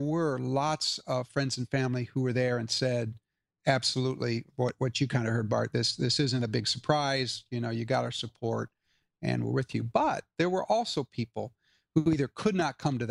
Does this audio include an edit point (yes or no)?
no